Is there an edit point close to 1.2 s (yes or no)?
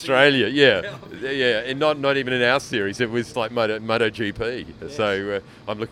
no